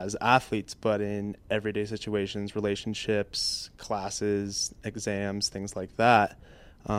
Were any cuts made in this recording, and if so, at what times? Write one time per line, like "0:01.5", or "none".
none